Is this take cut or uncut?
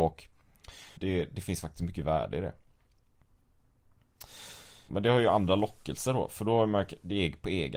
cut